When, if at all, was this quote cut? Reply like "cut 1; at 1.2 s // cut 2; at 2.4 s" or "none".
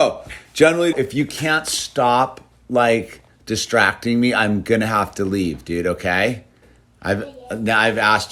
cut 1; at 0.9 s